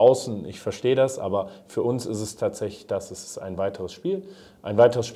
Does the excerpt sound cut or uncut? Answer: uncut